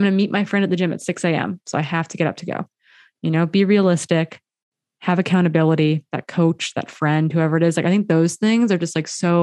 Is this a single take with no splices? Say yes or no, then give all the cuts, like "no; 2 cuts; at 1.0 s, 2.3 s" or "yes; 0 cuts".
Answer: yes; 0 cuts